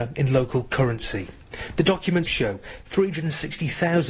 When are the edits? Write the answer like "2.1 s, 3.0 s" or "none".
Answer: 2.3 s